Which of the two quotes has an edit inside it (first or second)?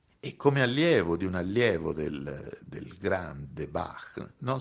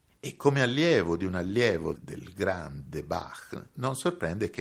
second